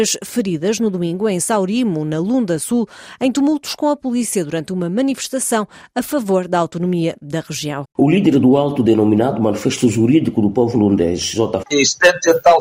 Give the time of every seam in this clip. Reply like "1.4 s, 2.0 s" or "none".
7.8 s, 11.6 s